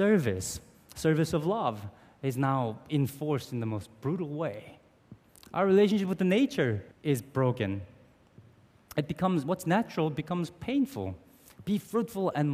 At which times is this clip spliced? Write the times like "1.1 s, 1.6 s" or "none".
5.3 s, 6.9 s

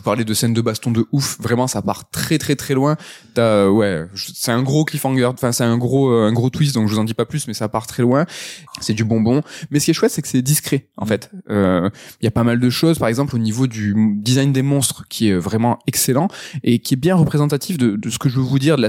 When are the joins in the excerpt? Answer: 8.7 s

